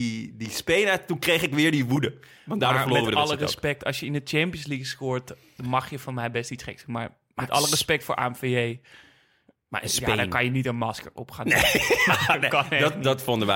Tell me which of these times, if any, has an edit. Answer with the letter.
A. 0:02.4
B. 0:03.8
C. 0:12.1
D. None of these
D